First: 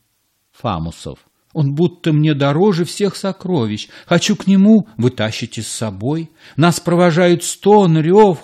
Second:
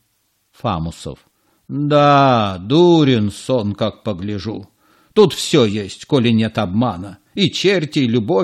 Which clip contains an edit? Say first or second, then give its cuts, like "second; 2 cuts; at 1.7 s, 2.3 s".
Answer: first; 1 cut; at 1.4 s